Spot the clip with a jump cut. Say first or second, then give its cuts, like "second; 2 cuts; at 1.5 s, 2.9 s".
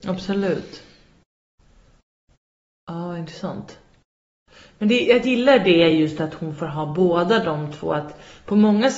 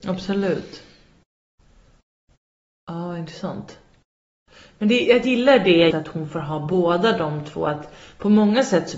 second; 1 cut; at 5.9 s